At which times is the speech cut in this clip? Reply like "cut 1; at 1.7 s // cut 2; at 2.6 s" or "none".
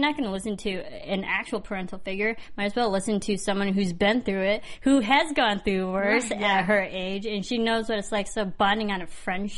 none

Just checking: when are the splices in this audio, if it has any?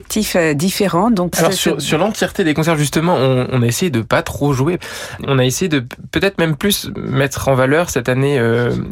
cut 1; at 5.2 s

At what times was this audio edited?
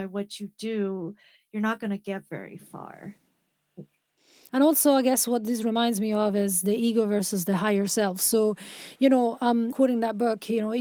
cut 1; at 4.5 s // cut 2; at 9.7 s

